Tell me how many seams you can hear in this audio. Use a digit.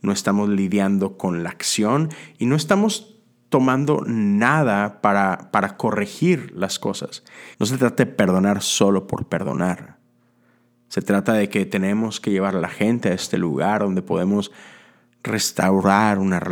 1